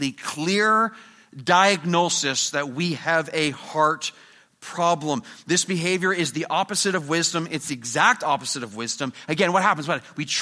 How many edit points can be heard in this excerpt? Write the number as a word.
zero